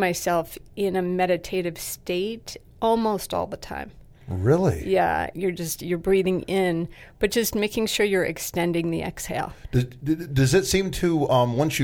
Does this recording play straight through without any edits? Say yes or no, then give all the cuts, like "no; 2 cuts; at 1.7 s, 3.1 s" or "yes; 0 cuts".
no; 1 cut; at 5.3 s